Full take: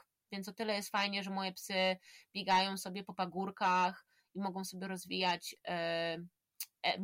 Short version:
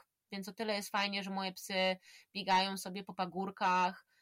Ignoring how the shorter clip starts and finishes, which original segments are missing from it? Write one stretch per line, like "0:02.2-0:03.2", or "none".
none